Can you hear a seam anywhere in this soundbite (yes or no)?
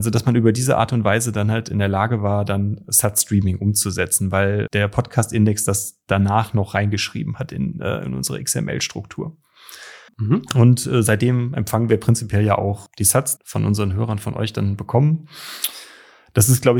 yes